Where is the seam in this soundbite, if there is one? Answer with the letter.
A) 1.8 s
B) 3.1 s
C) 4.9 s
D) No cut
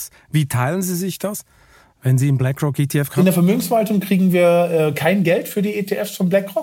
D